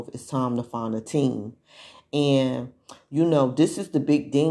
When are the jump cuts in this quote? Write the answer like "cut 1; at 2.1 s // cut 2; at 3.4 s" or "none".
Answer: none